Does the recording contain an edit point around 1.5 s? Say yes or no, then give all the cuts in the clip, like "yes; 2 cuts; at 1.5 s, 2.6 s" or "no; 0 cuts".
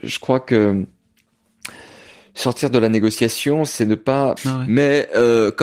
no; 1 cut; at 4.4 s